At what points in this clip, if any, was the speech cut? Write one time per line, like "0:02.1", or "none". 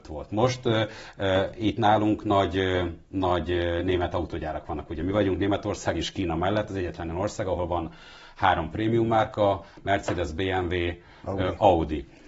none